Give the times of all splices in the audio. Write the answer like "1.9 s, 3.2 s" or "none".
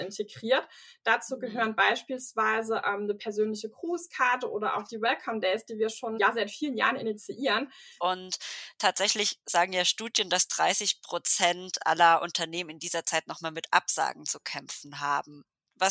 6.2 s, 8.0 s